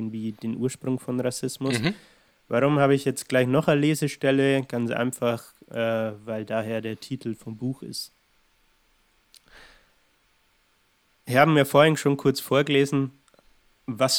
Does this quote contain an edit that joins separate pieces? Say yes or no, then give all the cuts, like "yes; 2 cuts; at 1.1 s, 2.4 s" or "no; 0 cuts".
no; 0 cuts